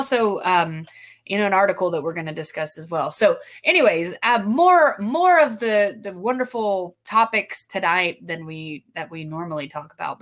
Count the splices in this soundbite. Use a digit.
0